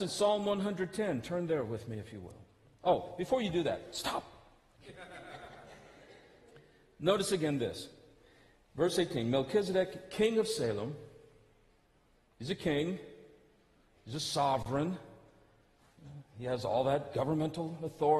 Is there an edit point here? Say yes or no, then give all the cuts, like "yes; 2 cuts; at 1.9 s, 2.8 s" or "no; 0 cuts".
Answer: no; 0 cuts